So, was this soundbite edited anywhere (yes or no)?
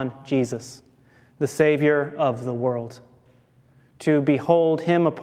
no